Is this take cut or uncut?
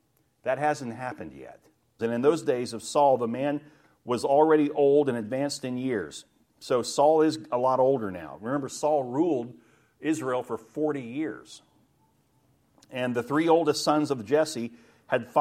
cut